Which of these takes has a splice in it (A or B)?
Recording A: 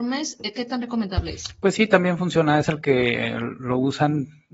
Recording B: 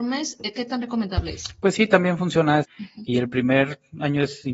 B